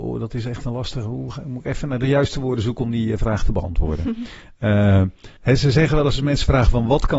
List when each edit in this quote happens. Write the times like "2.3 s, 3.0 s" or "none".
5.4 s